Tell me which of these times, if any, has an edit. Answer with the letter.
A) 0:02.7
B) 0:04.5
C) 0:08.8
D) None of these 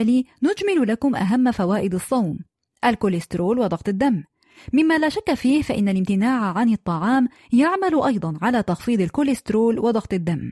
D